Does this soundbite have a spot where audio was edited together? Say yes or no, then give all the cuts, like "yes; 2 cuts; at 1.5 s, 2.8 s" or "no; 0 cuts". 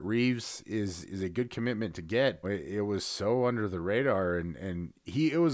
yes; 1 cut; at 2.4 s